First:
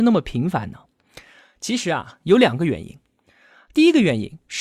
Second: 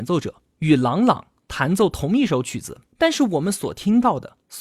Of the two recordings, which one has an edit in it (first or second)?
second